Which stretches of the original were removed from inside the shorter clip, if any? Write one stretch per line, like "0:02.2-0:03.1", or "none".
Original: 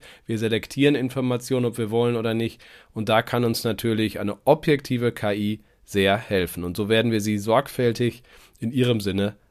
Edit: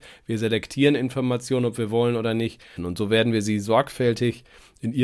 0:02.8-0:06.5